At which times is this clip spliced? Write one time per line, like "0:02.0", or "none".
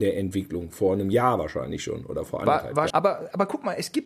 0:02.9